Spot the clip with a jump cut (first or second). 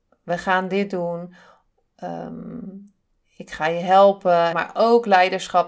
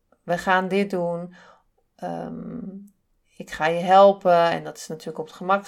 first